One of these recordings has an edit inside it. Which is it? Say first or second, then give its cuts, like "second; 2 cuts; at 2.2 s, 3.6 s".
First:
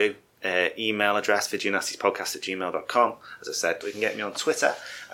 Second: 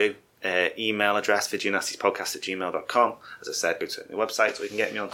first; 1 cut; at 3.8 s